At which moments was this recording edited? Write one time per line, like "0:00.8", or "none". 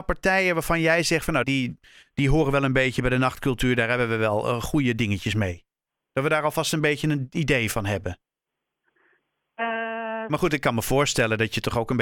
0:01.4
0:10.3